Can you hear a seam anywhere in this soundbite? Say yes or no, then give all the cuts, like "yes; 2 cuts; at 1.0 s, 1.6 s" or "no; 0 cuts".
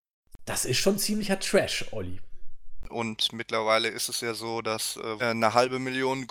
yes; 2 cuts; at 2.8 s, 5.2 s